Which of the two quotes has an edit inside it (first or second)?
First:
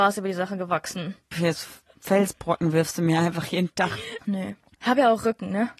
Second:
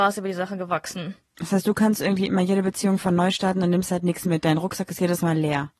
first